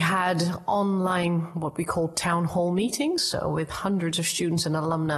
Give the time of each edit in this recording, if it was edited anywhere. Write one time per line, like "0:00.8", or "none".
none